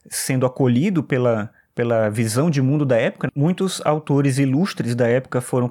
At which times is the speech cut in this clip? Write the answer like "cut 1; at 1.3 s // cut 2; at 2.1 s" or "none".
cut 1; at 3.3 s